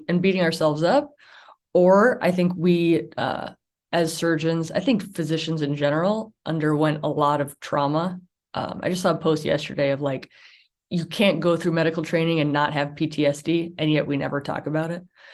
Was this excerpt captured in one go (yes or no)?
yes